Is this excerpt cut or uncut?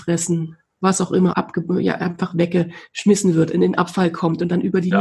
cut